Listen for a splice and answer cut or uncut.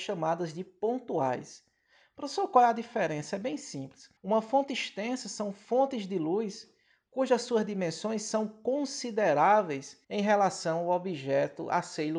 cut